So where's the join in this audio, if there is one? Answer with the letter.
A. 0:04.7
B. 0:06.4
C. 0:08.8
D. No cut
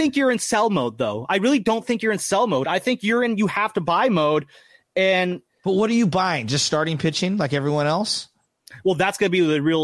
D